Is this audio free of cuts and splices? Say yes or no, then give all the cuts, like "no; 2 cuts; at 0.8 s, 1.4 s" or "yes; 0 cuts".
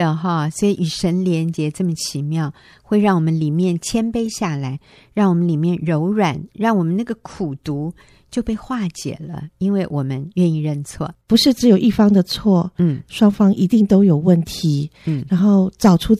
no; 1 cut; at 11.3 s